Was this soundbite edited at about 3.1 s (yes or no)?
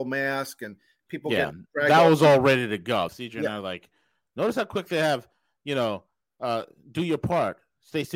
yes